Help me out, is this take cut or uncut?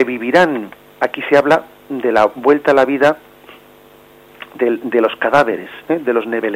uncut